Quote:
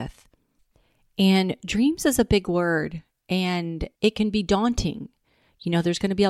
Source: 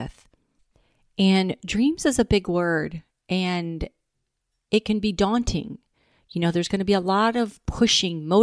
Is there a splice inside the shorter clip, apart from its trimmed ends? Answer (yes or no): yes